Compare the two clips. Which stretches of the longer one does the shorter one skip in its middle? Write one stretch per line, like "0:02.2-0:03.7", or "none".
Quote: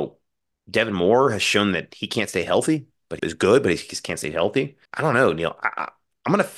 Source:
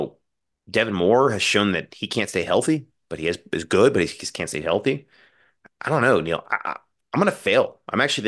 0:03.2-0:03.5
0:05.2-0:05.7